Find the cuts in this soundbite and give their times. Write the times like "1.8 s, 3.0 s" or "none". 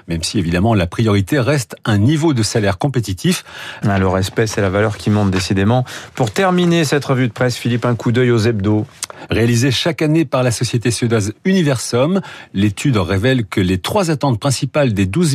3.8 s, 9.3 s